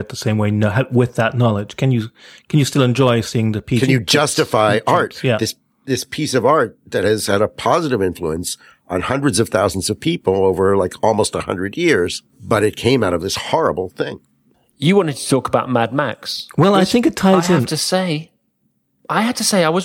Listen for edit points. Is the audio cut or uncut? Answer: cut